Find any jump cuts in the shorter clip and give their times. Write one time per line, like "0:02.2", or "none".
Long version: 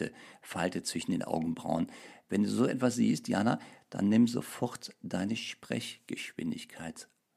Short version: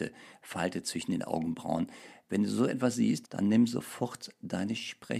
0:03.2